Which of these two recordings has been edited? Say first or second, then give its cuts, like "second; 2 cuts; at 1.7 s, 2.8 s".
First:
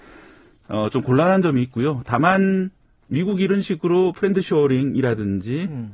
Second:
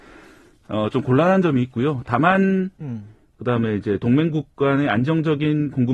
second; 1 cut; at 2.8 s